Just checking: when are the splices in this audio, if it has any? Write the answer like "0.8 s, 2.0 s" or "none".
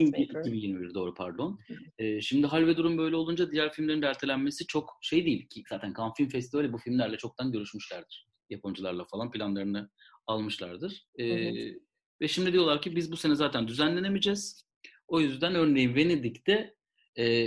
11.1 s